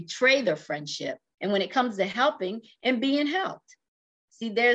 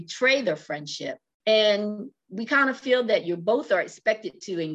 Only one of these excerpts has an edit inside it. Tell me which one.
first; 1 cut; at 1.4 s

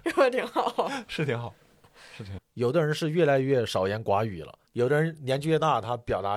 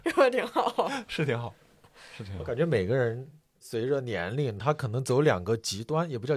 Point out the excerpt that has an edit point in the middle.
first; 2 cuts; at 2.4 s, 4.7 s

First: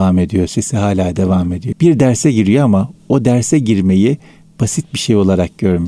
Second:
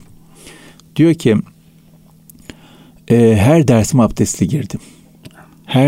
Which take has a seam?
first; 1 cut; at 1.7 s

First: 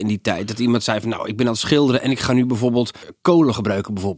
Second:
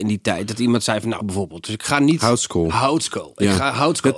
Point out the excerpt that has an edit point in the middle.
second; 1 cut; at 1.2 s

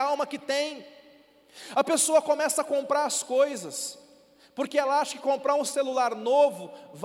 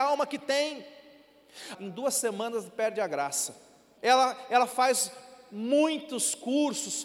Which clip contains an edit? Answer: second; 2 cuts; at 1.7 s, 4.0 s

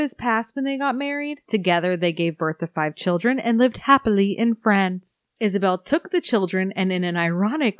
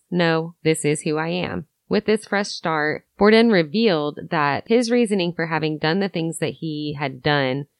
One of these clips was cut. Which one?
first; 2 cuts; at 1.5 s, 5.2 s

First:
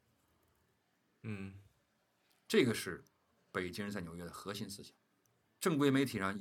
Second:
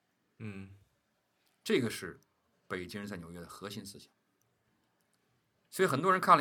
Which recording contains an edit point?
first; 1 cut; at 5.4 s

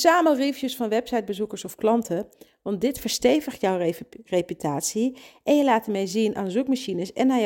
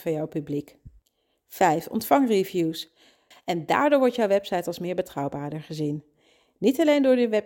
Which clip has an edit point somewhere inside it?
second; 1 cut; at 3.3 s

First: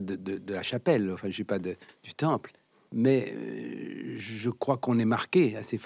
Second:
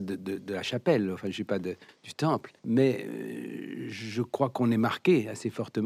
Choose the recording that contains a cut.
second; 1 cut; at 2.6 s

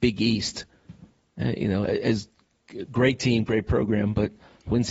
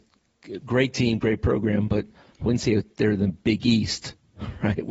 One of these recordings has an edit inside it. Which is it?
first; 1 cut; at 1.8 s

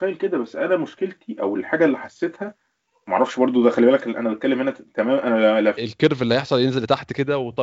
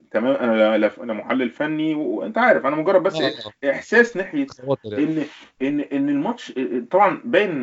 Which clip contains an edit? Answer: first; 1 cut; at 5.8 s

